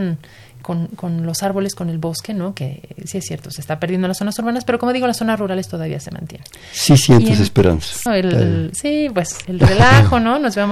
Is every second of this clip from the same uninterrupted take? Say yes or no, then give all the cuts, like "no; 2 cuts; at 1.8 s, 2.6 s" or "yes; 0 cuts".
no; 2 cuts; at 8.1 s, 9.4 s